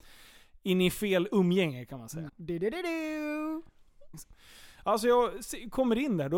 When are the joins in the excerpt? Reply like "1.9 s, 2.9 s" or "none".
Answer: 2.3 s, 4.1 s